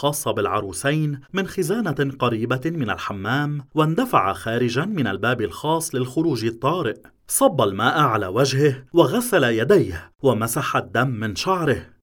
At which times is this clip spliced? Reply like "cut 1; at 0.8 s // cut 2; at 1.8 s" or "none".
cut 1; at 7.2 s